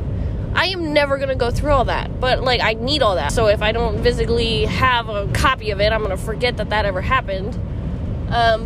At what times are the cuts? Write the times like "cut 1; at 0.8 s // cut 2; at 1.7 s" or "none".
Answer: cut 1; at 3.3 s